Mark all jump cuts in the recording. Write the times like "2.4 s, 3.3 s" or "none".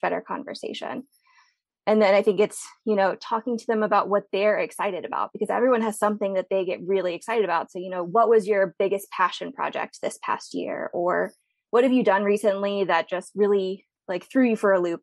none